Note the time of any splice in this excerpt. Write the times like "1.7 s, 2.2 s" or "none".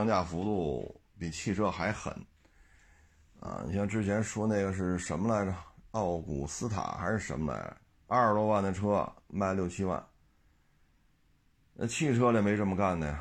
none